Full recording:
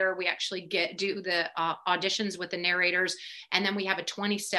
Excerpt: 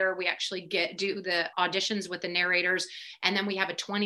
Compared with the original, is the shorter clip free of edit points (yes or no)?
no